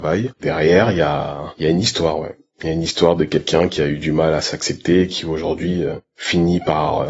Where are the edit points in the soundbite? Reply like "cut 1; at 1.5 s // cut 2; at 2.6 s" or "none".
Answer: none